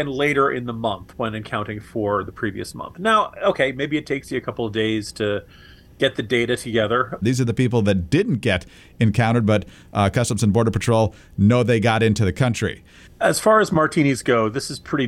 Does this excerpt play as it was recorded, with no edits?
no; 2 cuts; at 7.2 s, 13.1 s

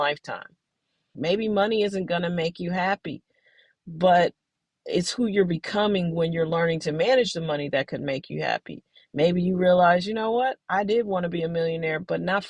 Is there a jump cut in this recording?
yes; 1 cut; at 1.1 s

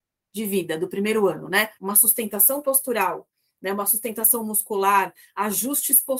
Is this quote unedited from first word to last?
no; 1 cut; at 1.8 s

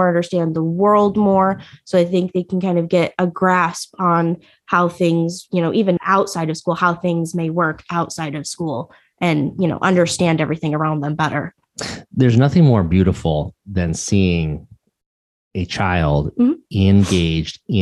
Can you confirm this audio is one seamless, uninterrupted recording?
no; 1 cut; at 6.0 s

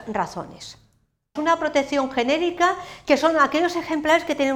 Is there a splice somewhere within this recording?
yes; 1 cut; at 1.4 s

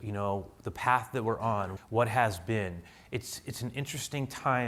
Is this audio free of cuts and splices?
no; 1 cut; at 1.8 s

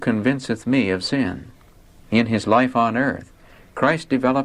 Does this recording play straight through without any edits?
no; 1 cut; at 2.0 s

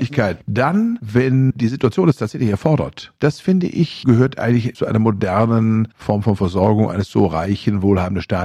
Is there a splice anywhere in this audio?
no; 0 cuts

